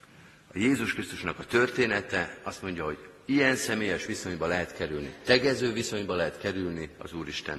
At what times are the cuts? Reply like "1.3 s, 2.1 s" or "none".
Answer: none